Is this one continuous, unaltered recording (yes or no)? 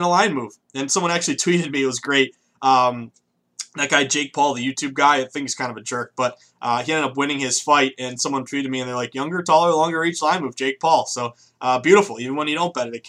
yes